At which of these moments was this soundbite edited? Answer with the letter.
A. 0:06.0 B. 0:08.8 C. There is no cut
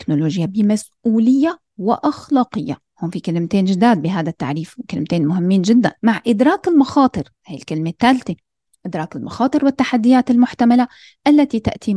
A